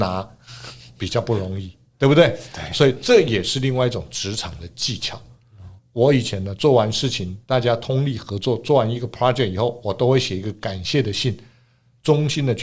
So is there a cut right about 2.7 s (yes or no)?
no